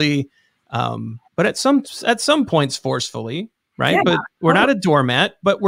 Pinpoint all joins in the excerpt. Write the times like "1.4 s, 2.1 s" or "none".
1.3 s

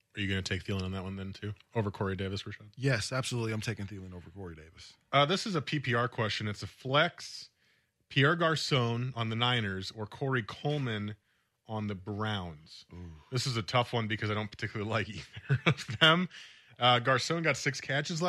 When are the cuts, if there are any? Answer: none

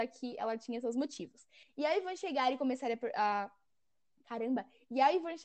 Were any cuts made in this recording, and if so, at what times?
1.6 s

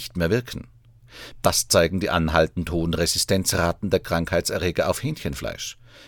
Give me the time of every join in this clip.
1.4 s

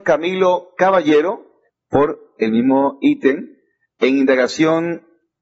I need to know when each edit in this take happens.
1.7 s

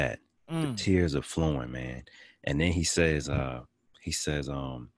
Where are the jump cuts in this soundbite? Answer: none

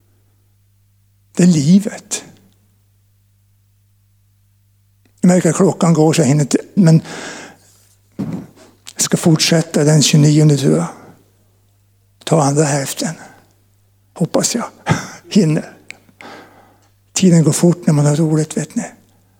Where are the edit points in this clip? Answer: 6.8 s

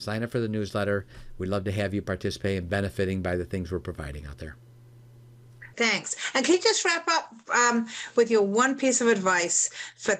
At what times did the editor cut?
5.7 s

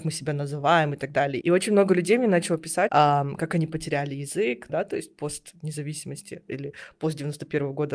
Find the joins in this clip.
1.4 s, 2.9 s, 4.7 s

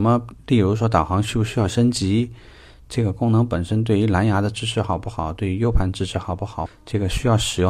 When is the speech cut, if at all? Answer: 6.7 s

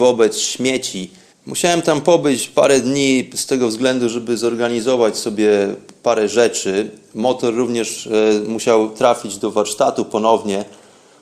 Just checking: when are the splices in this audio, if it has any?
1.3 s

